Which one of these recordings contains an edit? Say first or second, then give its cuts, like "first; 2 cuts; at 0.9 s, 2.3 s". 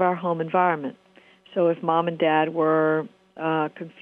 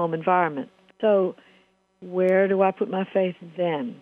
second; 1 cut; at 0.9 s